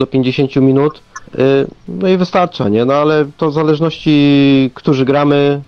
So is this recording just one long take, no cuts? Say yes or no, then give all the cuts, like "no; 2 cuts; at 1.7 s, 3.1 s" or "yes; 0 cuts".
no; 1 cut; at 1.3 s